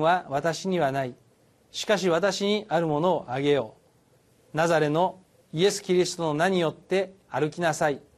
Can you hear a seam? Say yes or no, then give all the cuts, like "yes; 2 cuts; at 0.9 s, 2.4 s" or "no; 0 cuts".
no; 0 cuts